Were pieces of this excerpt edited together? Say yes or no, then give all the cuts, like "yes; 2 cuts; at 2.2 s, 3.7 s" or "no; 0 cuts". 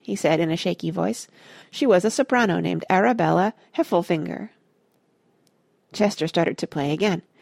yes; 1 cut; at 1.6 s